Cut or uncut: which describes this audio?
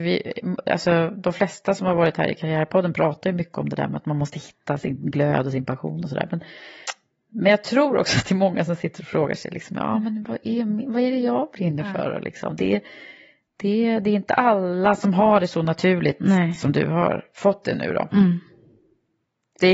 uncut